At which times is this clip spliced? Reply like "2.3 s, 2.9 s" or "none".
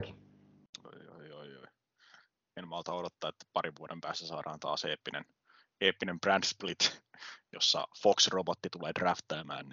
none